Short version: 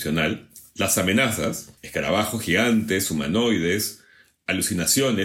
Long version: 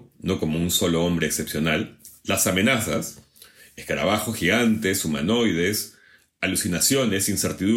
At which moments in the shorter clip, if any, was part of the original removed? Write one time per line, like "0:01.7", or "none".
0:01.8